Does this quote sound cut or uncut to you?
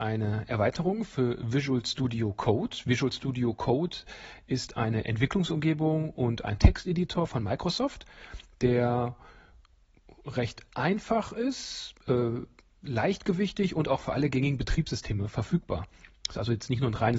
uncut